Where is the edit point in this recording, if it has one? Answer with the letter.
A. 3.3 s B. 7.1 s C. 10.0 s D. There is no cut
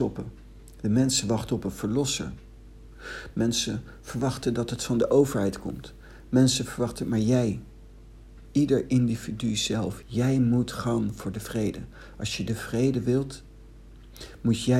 C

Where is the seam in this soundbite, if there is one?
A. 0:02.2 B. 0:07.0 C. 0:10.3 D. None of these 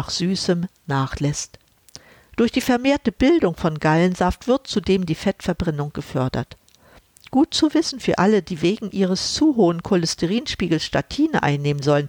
D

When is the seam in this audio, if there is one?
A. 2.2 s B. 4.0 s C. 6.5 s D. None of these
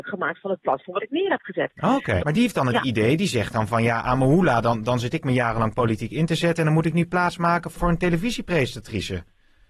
A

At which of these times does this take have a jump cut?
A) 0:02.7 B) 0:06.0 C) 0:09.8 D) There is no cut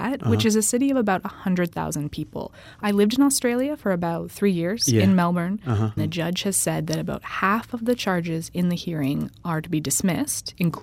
B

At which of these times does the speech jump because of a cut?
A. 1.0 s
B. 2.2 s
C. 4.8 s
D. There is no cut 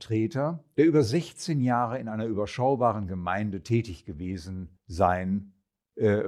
C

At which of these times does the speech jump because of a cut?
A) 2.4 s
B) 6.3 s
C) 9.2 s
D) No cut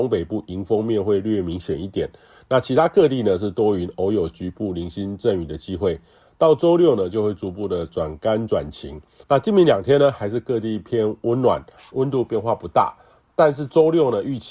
C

